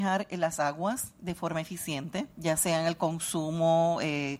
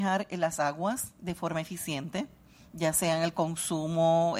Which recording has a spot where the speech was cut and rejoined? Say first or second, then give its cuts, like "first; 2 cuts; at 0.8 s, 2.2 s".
first; 1 cut; at 2.3 s